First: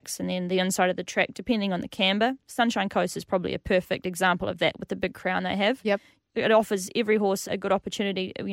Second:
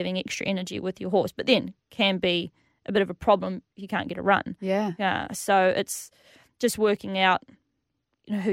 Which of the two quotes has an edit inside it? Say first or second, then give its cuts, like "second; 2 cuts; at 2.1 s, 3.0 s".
first; 2 cuts; at 6.2 s, 7.4 s